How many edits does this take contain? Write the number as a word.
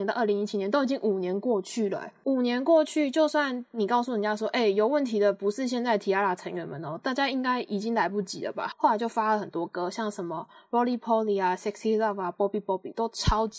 one